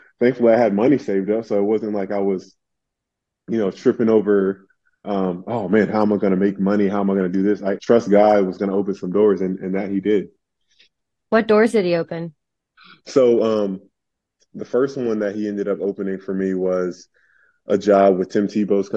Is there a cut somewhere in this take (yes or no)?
yes